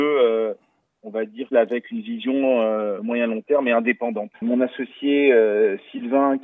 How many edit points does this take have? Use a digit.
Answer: 2